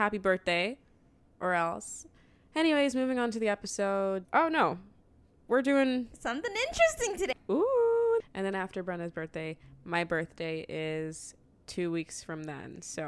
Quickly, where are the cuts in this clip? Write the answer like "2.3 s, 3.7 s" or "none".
4.2 s, 7.3 s